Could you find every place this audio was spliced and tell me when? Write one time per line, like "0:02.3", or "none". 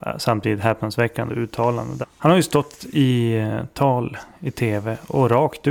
0:02.0

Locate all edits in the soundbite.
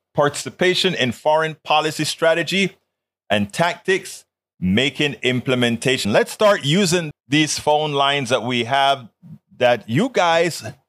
0:06.0
0:07.1

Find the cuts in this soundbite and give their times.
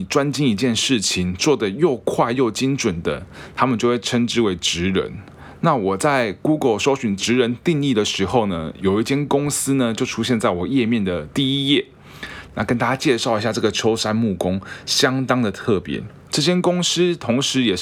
0:12.5

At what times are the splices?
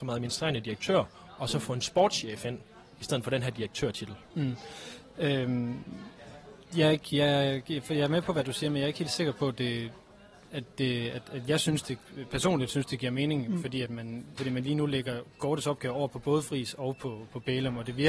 0:14.4

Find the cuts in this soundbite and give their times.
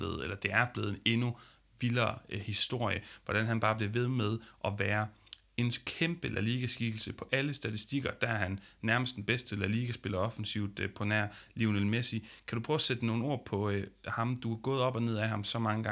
none

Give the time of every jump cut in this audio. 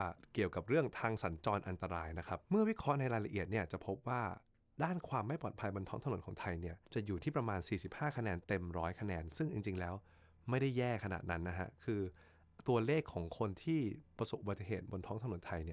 0:02.4
0:06.9

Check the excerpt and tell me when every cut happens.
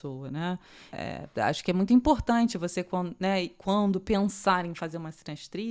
0:00.9

